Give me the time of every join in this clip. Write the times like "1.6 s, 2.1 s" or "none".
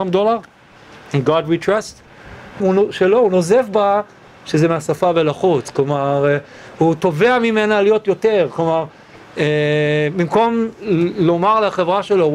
2.6 s